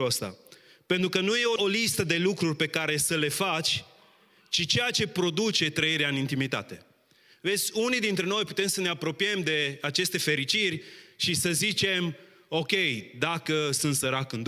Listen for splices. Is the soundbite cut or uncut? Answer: cut